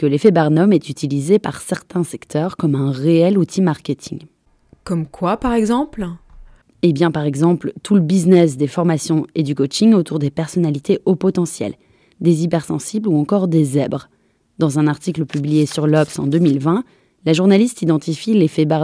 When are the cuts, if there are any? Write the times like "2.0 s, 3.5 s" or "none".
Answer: none